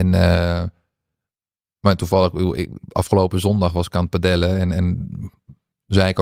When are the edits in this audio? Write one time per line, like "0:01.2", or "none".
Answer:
none